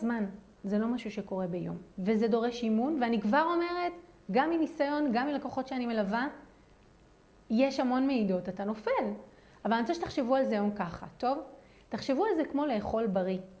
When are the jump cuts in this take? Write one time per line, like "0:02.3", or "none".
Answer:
0:01.9

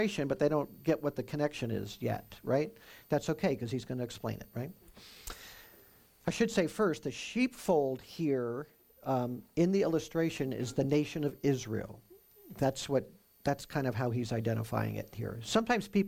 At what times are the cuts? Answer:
none

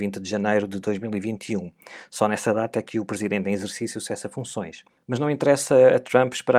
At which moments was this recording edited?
none

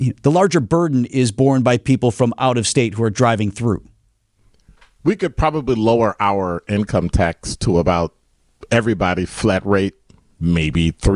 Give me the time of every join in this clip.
none

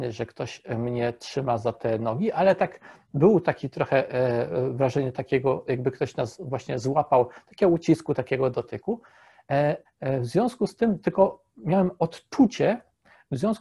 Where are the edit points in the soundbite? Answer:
0:09.9

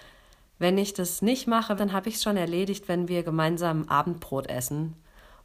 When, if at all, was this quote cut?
0:01.8

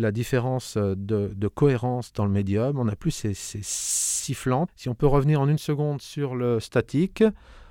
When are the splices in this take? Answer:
0:04.7

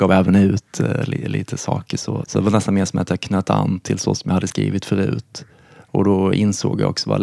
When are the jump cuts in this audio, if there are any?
0:02.2

